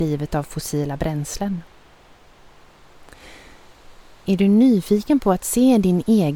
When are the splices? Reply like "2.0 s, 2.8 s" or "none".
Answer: 4.3 s